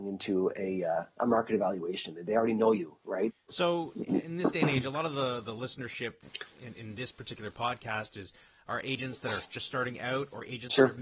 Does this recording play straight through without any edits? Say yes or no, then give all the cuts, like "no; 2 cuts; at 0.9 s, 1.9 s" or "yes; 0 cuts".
no; 1 cut; at 3.3 s